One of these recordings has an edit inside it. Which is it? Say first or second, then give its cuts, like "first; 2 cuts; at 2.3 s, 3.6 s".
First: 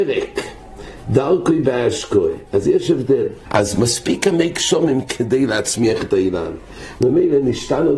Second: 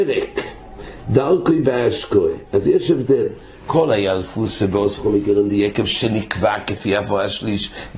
first; 2 cuts; at 3.4 s, 7.0 s